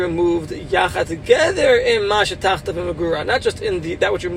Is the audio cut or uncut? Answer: uncut